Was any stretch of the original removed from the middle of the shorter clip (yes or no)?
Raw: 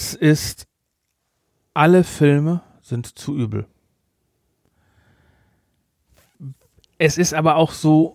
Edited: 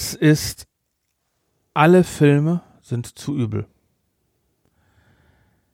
no